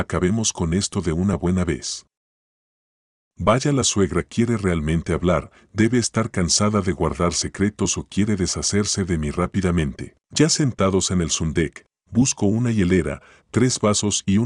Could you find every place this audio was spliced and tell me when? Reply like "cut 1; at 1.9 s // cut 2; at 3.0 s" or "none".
cut 1; at 10.2 s

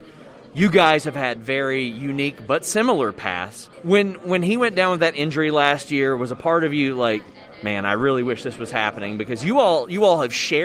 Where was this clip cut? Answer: cut 1; at 3.7 s

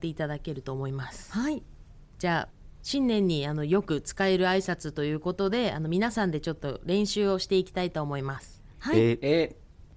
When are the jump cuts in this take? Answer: none

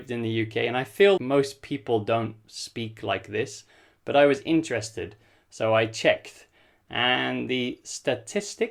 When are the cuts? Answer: cut 1; at 1.2 s

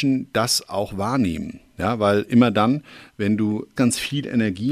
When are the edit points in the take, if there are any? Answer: cut 1; at 3.8 s

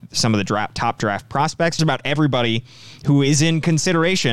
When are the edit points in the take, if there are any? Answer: cut 1; at 1.8 s

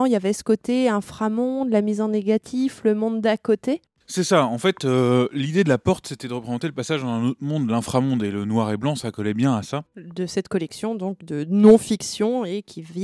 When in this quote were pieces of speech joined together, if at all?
cut 1; at 9.9 s

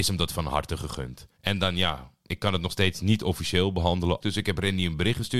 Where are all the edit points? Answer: cut 1; at 1.4 s // cut 2; at 4.2 s

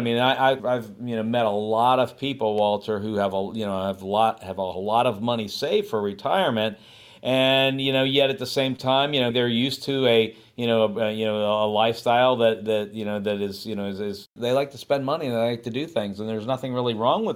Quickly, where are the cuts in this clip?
cut 1; at 9.3 s

